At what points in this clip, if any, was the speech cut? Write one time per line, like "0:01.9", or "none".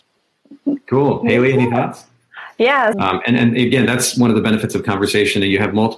0:02.9

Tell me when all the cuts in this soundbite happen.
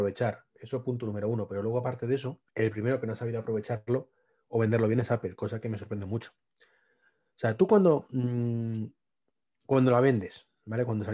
0:02.5

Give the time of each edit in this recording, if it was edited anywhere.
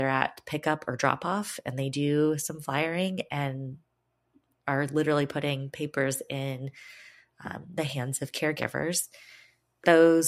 none

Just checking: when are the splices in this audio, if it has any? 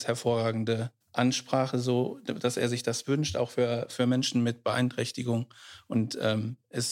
0:01.0

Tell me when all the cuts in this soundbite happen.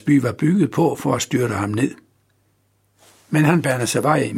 none

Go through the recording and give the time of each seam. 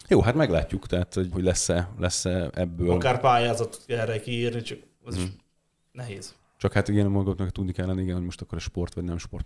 0:01.3

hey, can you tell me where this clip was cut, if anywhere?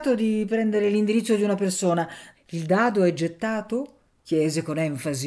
0:02.3

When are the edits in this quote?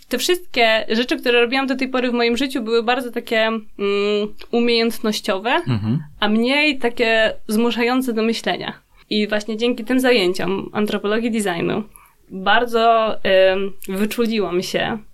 0:09.0

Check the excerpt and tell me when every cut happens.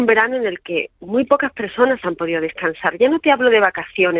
0:01.0

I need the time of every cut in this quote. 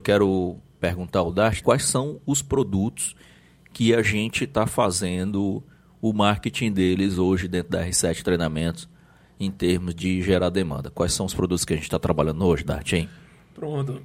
0:01.6

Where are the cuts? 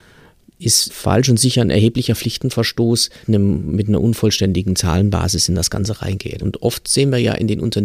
0:03.2
0:06.4

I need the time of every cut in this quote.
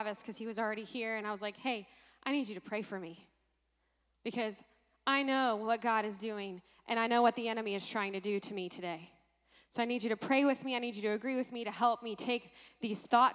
none

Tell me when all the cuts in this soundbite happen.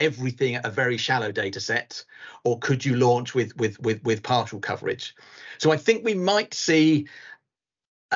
none

